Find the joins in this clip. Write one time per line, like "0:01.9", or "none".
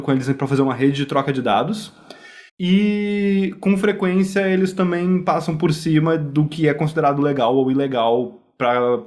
0:02.5